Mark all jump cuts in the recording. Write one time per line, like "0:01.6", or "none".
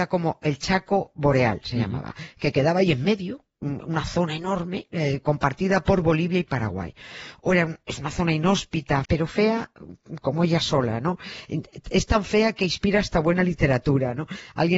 0:09.0